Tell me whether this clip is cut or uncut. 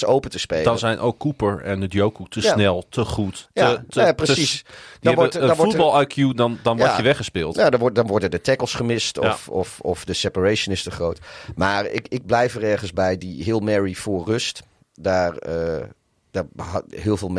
uncut